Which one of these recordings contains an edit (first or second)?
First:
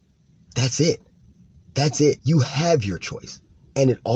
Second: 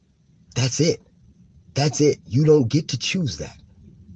first